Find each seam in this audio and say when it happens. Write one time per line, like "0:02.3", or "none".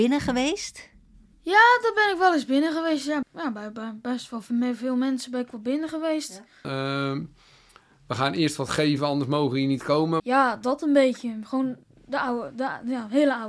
0:03.2
0:06.6
0:10.2